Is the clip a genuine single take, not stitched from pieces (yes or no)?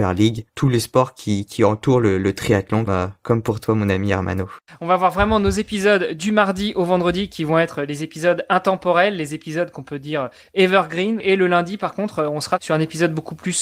no